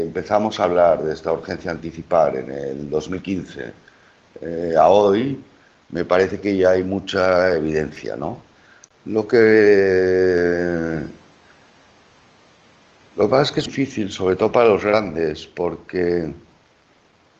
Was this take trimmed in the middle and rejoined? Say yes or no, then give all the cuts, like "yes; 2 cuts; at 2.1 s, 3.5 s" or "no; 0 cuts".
yes; 1 cut; at 13.7 s